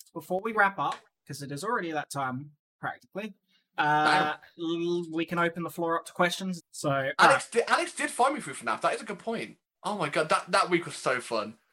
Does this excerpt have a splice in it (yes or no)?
yes